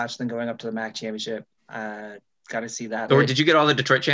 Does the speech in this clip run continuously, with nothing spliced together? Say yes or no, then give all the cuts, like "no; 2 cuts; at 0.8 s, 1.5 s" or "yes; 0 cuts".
no; 2 cuts; at 1.6 s, 3.1 s